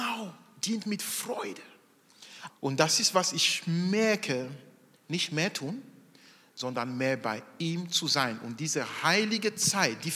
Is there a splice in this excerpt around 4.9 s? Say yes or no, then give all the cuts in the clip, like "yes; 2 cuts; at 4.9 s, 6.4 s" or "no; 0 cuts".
yes; 2 cuts; at 2.5 s, 4.9 s